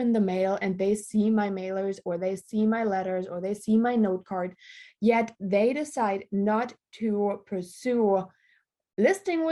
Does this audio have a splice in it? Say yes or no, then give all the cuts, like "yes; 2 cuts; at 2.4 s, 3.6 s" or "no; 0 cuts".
no; 0 cuts